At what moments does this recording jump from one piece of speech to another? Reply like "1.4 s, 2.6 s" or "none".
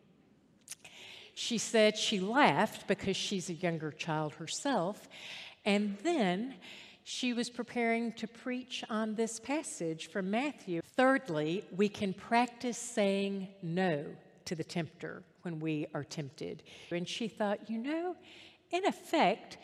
10.8 s, 16.9 s